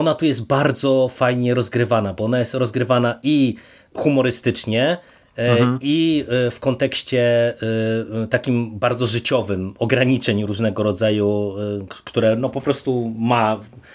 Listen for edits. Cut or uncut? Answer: uncut